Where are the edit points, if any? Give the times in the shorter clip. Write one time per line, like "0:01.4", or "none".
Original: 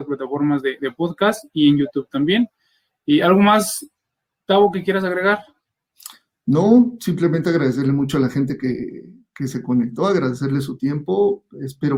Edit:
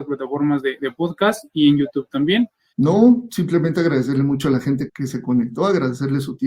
0:02.7
0:04.9